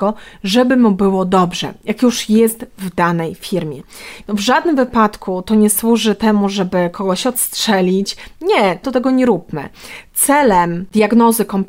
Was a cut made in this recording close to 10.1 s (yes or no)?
no